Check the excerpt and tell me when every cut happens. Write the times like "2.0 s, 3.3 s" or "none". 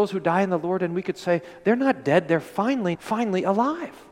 2.9 s